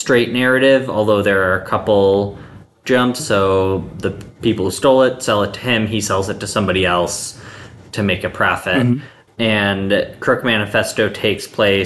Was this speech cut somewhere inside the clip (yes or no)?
yes